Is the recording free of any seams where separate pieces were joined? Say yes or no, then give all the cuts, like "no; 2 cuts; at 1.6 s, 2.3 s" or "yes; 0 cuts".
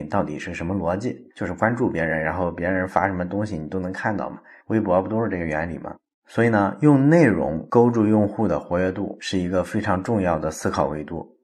yes; 0 cuts